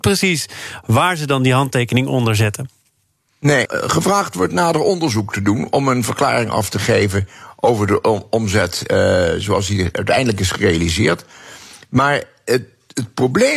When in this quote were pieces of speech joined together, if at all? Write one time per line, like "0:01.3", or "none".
0:03.7